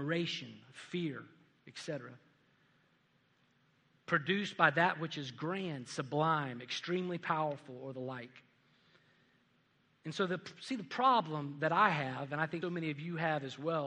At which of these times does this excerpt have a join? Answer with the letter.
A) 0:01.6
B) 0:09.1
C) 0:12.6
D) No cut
C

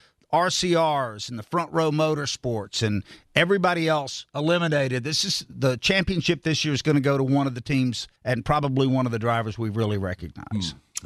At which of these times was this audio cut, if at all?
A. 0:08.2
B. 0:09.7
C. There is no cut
A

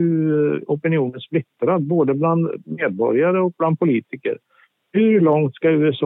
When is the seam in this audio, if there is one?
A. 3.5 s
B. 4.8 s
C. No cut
C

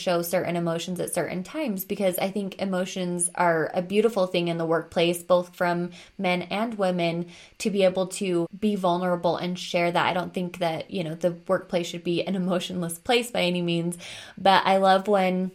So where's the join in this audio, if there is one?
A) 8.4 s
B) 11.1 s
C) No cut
A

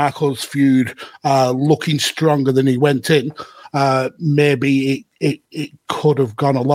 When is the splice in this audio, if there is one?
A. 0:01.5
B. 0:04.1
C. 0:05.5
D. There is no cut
C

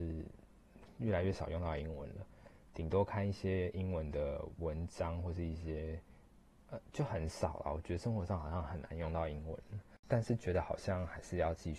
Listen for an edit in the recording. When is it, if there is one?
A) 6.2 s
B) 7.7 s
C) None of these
C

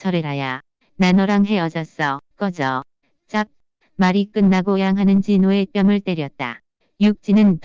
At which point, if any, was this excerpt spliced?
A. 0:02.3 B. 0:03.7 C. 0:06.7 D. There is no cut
A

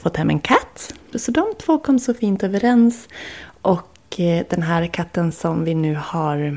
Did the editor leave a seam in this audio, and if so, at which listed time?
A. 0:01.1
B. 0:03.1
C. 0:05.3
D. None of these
A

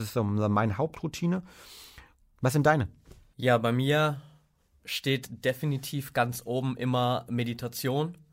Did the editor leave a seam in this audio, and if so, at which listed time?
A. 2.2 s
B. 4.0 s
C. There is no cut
A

